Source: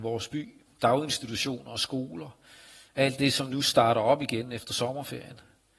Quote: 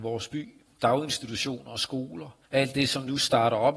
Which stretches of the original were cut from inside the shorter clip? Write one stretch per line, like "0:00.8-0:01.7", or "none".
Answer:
0:02.5-0:02.9